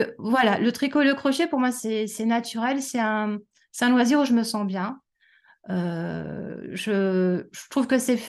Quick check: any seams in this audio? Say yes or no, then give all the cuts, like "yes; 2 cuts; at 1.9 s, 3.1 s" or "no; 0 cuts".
no; 0 cuts